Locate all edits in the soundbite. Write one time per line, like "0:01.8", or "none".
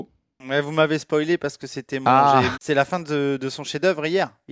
0:02.5